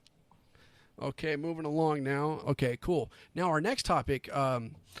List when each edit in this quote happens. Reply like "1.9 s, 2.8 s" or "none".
2.4 s